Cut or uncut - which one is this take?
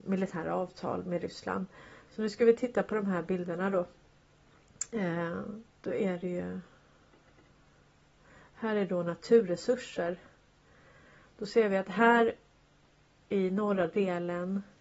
cut